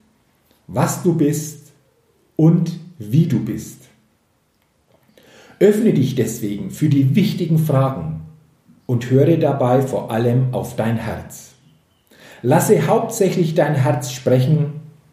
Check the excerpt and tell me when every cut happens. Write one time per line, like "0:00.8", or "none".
none